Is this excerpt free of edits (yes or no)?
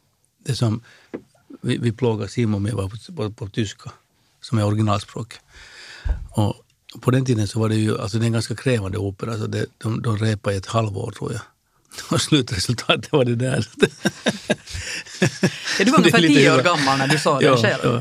yes